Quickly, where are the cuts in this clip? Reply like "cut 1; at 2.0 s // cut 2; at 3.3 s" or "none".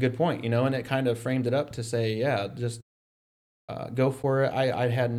none